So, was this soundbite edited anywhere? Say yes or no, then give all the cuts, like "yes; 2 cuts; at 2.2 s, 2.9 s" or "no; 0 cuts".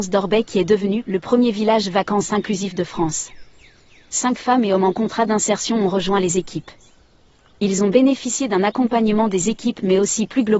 no; 0 cuts